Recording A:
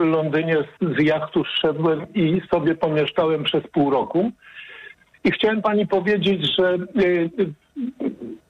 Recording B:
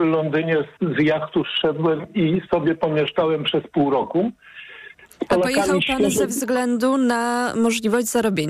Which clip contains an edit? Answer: B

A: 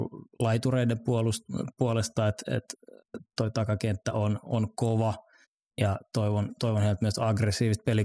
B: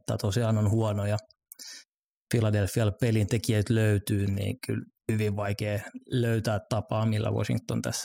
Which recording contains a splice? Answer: B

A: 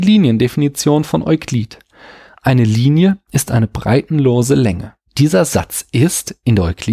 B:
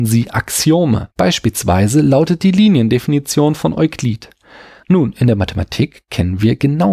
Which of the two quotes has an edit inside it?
B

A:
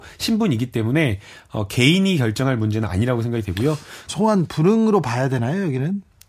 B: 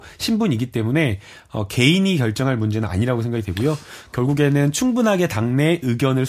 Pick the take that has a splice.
A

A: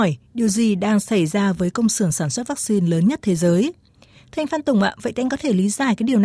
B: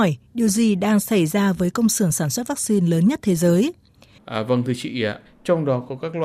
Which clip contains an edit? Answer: B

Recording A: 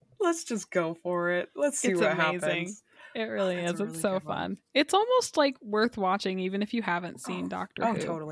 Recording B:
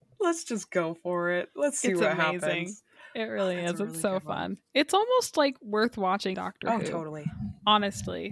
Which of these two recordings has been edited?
B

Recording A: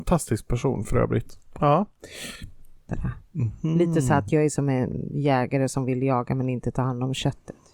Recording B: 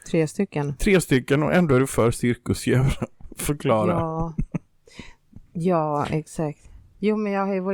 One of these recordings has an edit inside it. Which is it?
A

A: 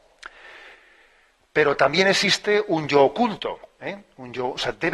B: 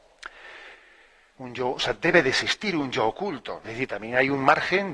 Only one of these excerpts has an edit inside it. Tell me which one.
B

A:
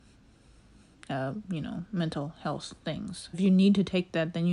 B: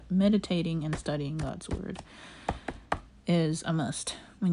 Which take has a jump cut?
A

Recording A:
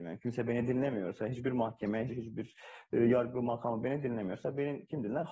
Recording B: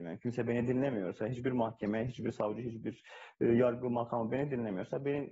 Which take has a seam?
A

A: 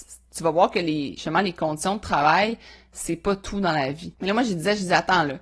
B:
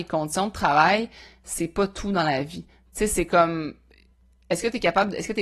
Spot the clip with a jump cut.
A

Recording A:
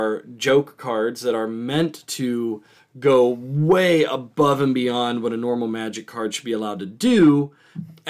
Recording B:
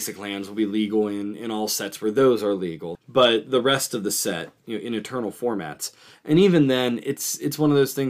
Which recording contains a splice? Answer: B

